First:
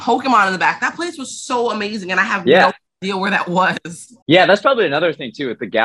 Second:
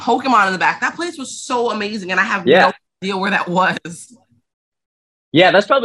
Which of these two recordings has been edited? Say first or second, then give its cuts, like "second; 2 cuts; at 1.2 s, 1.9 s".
first; 1 cut; at 4.2 s